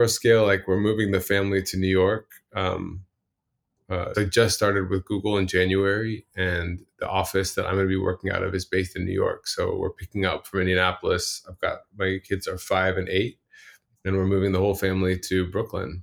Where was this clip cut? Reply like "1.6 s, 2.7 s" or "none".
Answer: 4.1 s